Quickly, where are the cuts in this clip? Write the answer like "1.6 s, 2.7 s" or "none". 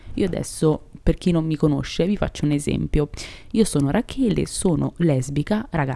none

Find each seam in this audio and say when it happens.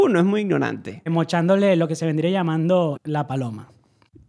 1.1 s, 2.9 s

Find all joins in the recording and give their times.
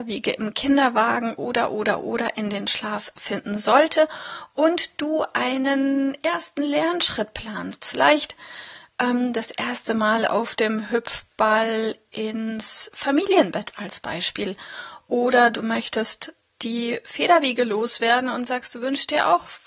none

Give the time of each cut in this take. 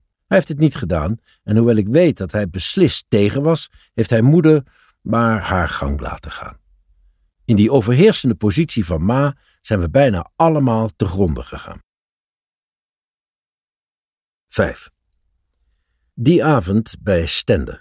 none

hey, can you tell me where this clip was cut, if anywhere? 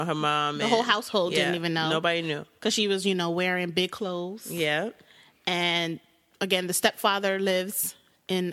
none

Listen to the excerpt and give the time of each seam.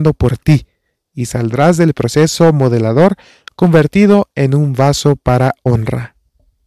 none

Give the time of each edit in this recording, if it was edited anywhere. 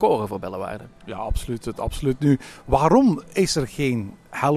none

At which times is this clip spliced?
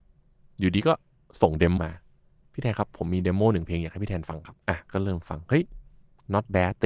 1.8 s, 4.6 s

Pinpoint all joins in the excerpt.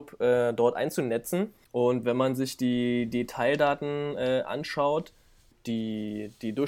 1.6 s

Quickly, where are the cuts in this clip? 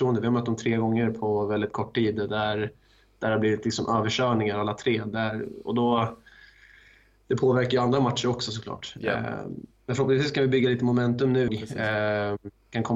11.5 s

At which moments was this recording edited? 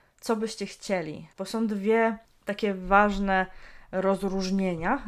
1.4 s

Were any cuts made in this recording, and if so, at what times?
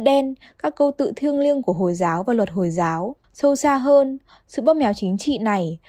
3.2 s

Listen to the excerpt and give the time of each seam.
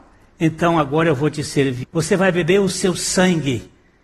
1.8 s

